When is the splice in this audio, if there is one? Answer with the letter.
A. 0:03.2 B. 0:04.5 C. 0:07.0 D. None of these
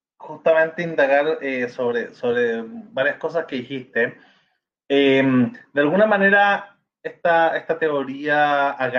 D